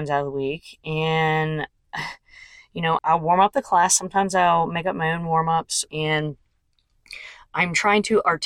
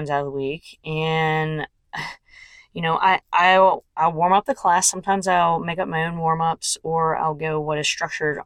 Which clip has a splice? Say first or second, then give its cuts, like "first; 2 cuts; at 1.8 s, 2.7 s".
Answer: first; 2 cuts; at 3.0 s, 5.9 s